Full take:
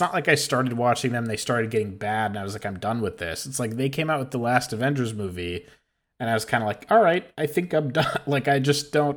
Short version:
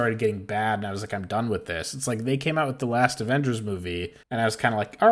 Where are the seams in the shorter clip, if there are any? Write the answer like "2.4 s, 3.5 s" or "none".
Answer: 4.2 s